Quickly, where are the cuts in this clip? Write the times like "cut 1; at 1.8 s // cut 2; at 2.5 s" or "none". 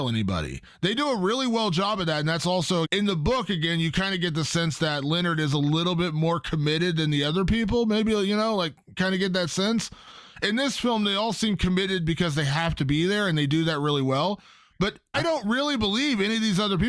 cut 1; at 2.8 s // cut 2; at 15.1 s